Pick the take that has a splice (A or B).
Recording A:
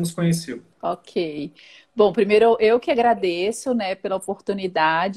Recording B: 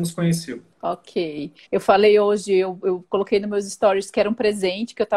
B